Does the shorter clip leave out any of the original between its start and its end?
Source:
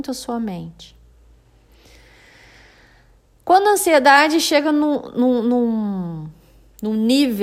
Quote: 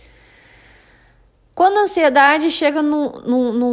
no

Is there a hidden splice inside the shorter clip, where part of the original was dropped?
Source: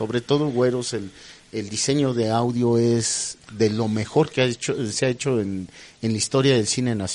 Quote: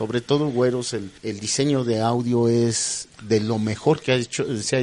yes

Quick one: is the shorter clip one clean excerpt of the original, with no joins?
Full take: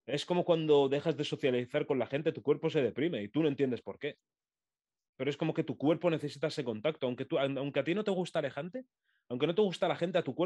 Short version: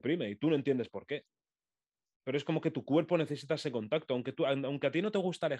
yes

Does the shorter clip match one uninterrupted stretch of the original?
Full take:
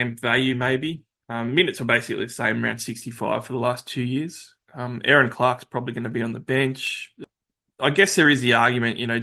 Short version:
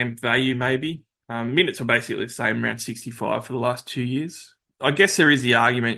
no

